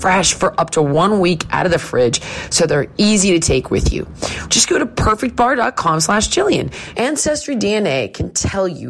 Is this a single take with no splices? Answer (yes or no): no